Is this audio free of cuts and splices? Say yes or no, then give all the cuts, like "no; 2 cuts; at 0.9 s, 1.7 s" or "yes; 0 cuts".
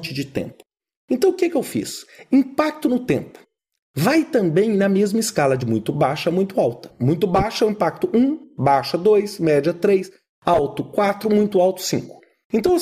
yes; 0 cuts